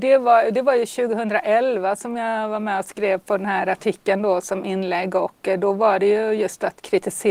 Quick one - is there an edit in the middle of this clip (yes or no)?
no